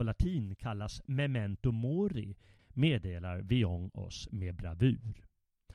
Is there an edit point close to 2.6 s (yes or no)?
yes